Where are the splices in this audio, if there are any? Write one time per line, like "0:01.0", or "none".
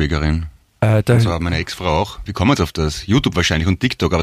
0:02.3